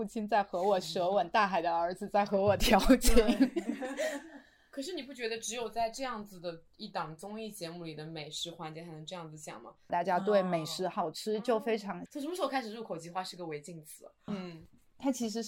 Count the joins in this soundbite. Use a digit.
3